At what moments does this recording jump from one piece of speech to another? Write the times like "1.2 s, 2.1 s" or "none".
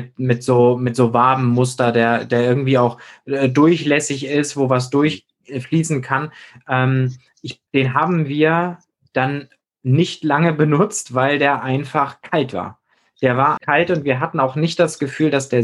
7.7 s, 13.6 s